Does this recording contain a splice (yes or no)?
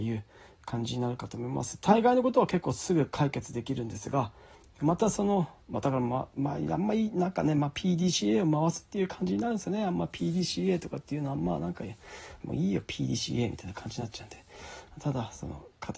yes